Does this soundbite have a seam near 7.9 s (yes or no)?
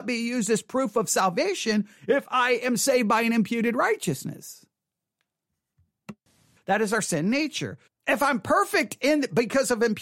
yes